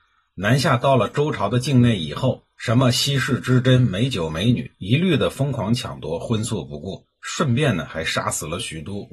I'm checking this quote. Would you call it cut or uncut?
uncut